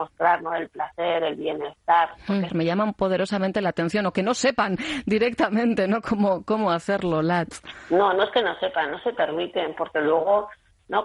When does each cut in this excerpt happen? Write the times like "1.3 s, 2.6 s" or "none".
2.5 s